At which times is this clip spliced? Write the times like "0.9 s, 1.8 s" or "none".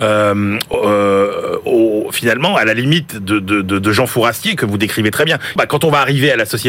5.6 s